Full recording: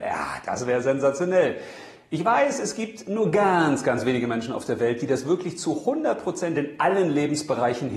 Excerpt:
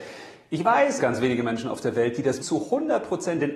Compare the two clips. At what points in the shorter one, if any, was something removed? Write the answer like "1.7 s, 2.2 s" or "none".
1.0 s, 2.4 s